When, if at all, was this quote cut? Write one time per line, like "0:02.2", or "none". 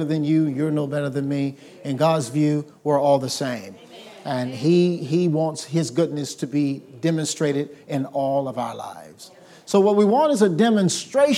none